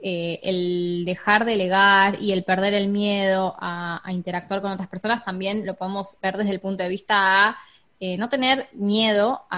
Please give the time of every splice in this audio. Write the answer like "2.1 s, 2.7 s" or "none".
6.2 s

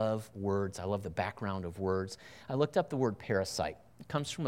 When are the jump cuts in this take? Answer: none

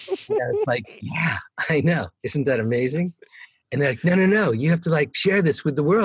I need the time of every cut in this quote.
none

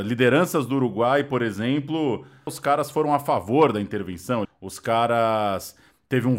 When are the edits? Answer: 2.5 s, 4.5 s

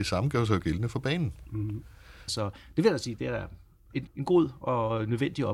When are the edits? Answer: 2.3 s, 4.1 s

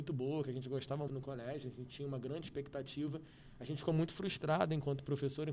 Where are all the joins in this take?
1.1 s

